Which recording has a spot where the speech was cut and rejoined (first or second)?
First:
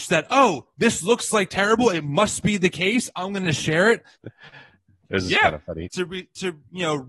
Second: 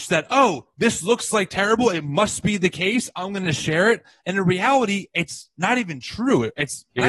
first